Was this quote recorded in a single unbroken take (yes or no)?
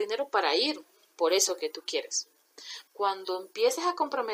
no